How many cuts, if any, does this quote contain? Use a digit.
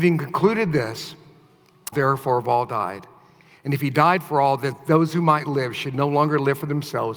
1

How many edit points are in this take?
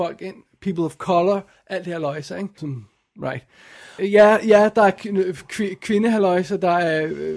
2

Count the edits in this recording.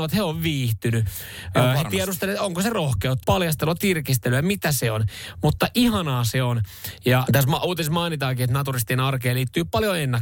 2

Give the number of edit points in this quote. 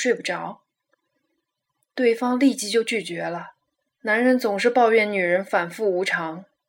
1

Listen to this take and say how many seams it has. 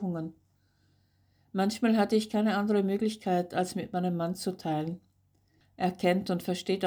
1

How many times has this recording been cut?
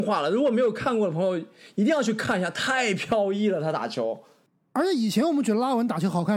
0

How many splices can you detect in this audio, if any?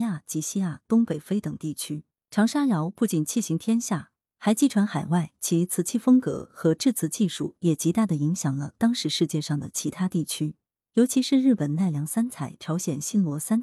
0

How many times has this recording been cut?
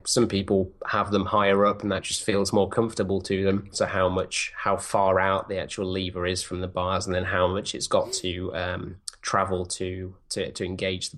2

